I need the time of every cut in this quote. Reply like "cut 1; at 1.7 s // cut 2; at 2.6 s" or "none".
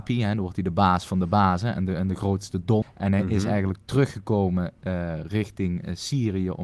cut 1; at 2.8 s

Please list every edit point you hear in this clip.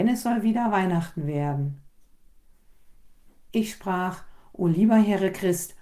none

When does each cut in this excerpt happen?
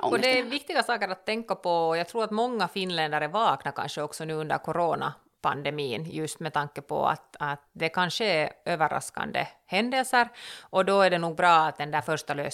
none

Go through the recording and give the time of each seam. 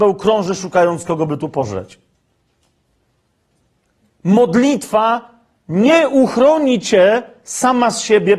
none

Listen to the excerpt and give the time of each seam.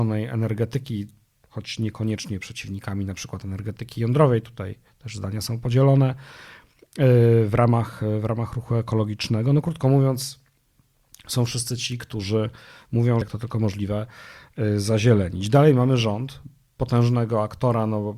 cut 1; at 13.2 s

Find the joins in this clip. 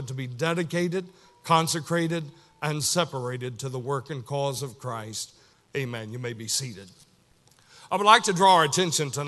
cut 1; at 5.5 s

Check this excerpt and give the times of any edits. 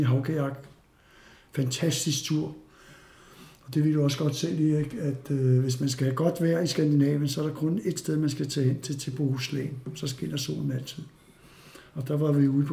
none

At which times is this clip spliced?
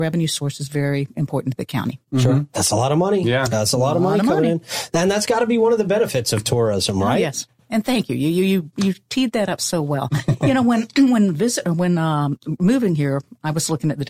none

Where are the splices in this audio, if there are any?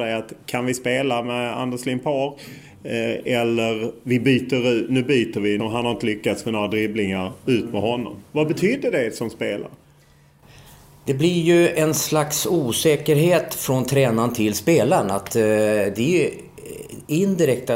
cut 1; at 5.6 s

